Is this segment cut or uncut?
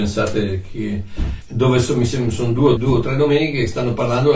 cut